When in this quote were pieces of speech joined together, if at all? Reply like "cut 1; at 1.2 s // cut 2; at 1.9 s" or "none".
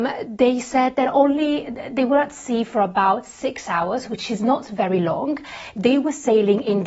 none